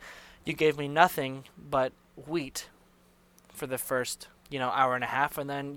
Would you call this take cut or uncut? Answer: cut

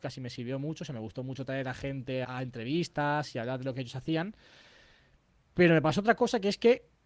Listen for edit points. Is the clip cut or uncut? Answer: cut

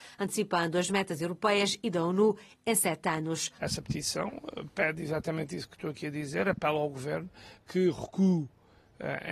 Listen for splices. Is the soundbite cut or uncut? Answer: cut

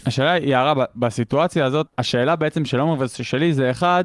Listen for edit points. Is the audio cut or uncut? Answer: cut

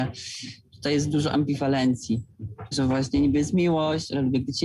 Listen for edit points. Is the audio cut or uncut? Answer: cut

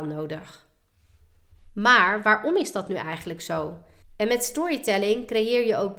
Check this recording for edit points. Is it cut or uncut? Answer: cut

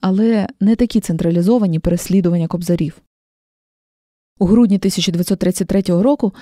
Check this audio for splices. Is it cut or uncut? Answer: uncut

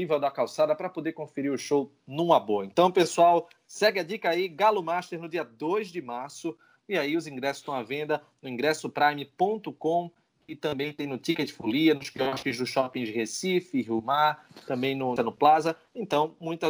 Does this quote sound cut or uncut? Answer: cut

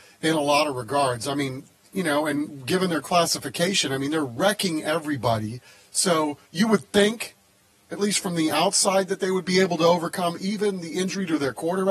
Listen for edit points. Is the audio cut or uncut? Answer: cut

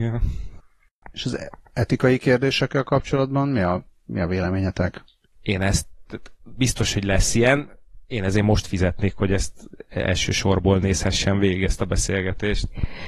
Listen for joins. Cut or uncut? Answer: cut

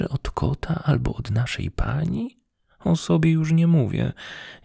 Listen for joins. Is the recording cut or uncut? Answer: uncut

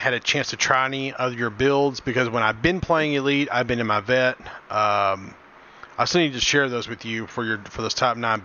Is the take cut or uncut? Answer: uncut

